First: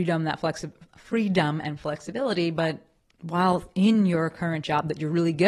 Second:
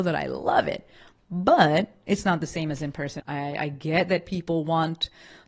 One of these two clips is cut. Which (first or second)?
second